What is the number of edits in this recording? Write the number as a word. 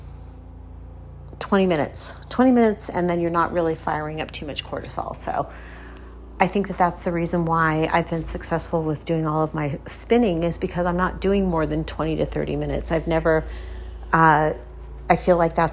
zero